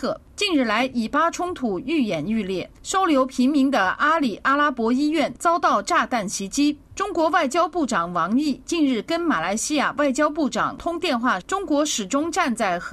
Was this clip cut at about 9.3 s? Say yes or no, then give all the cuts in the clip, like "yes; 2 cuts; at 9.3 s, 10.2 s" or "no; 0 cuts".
no; 2 cuts; at 6.9 s, 11.4 s